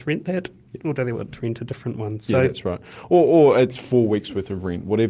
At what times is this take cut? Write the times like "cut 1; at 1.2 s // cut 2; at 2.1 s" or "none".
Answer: none